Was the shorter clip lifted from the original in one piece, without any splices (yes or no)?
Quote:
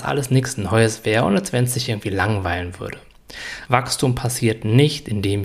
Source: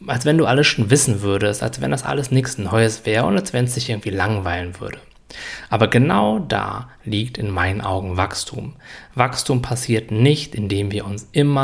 no